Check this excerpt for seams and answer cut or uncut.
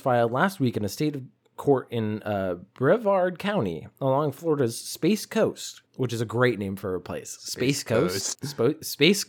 cut